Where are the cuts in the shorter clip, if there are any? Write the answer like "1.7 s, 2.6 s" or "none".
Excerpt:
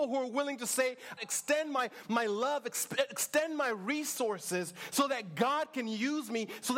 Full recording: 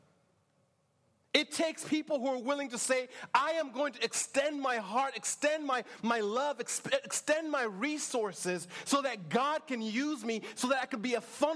1.2 s